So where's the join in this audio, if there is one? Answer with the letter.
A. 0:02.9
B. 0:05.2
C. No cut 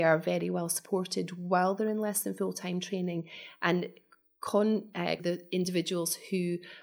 B